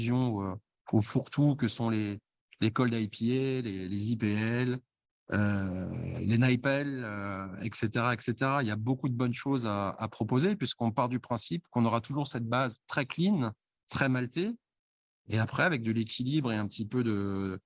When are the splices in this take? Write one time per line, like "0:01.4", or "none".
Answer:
none